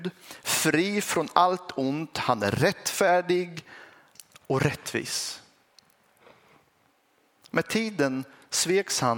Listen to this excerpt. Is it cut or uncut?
uncut